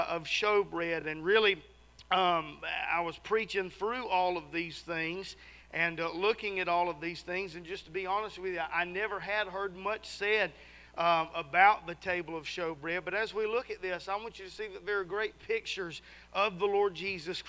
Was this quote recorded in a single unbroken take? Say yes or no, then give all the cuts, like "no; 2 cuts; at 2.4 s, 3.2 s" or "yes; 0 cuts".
yes; 0 cuts